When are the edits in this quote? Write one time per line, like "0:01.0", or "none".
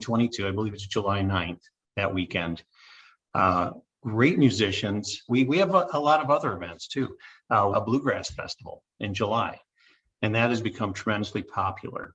0:05.3
0:07.7

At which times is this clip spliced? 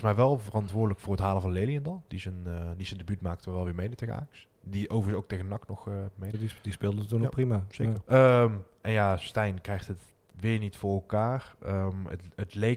0:06.3
0:08.0

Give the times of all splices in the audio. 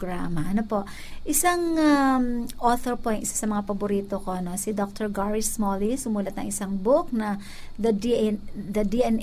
none

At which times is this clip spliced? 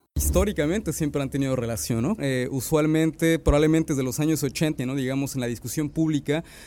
0:02.2
0:04.8

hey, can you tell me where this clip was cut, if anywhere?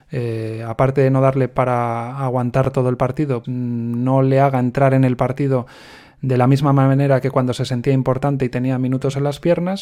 0:03.4

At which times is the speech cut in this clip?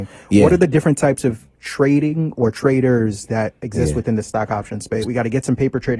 0:05.0

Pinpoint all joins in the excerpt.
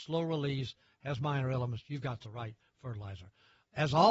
none

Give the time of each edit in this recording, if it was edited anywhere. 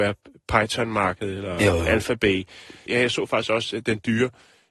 0:02.9

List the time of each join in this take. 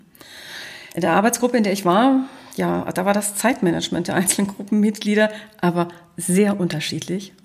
none

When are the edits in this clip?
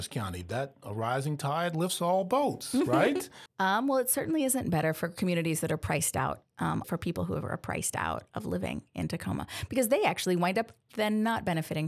0:03.5
0:06.8

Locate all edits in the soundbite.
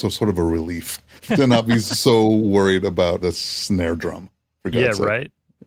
0:01.3
0:03.2

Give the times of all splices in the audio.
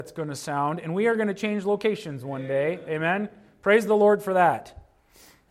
none

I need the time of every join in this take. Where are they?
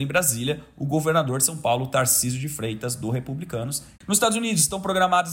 0:03.9

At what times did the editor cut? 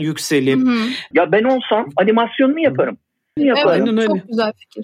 0:01.1
0:03.4

